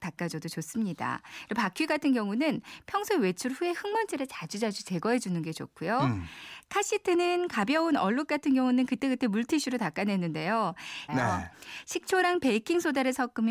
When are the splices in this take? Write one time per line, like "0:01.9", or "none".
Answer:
0:11.1

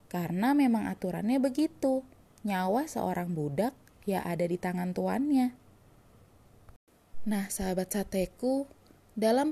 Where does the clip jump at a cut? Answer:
none

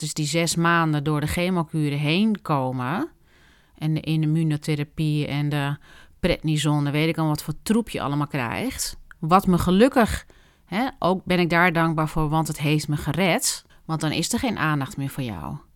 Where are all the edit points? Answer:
0:13.7

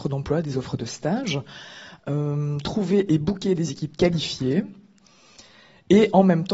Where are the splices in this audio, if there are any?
none

